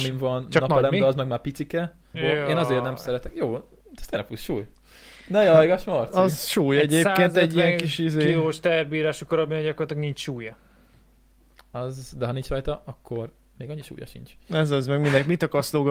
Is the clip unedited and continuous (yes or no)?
no